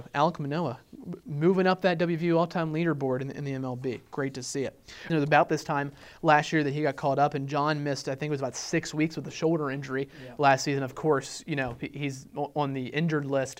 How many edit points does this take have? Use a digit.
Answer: 1